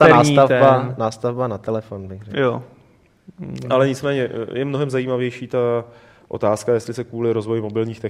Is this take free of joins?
yes; 0 cuts

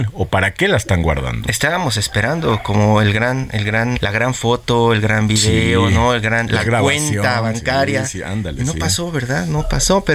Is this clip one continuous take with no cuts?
no; 2 cuts; at 3.9 s, 6.6 s

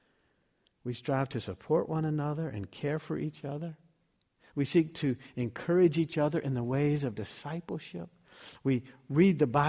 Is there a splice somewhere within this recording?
no; 0 cuts

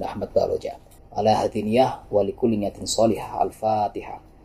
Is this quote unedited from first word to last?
no; 1 cut; at 1.0 s

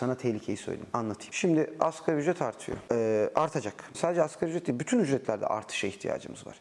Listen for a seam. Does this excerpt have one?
yes; 2 cuts; at 1.3 s, 3.9 s

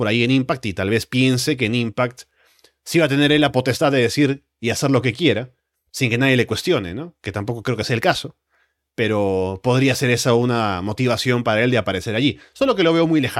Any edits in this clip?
no; 0 cuts

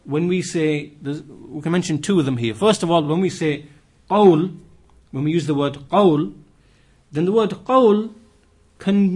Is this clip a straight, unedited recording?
yes; 0 cuts

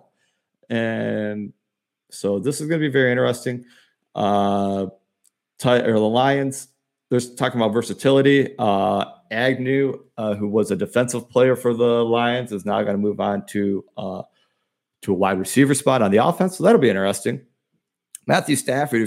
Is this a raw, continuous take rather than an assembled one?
yes; 0 cuts

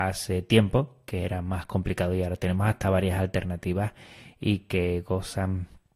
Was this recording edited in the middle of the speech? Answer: no; 0 cuts

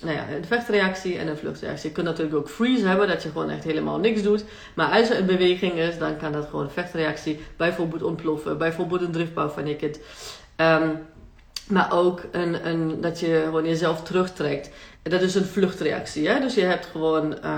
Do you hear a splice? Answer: yes; 1 cut; at 14.9 s

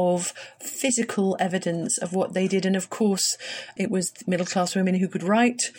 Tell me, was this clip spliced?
no; 0 cuts

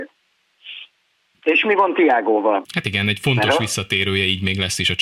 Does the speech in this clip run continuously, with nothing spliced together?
no; 2 cuts; at 1.3 s, 2.6 s

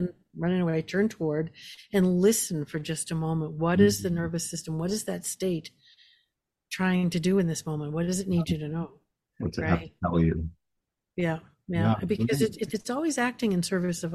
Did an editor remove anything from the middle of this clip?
yes; 1 cut; at 12.7 s

